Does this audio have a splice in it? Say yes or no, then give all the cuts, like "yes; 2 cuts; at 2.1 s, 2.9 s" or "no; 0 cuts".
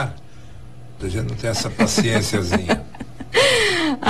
yes; 1 cut; at 1.0 s